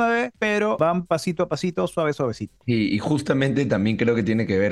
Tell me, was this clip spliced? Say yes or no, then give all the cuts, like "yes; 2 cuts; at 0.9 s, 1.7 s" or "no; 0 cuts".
no; 0 cuts